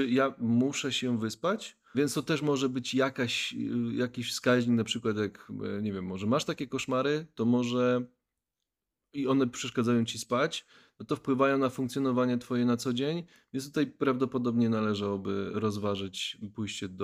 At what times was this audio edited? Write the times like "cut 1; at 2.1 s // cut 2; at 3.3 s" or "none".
cut 1; at 1.9 s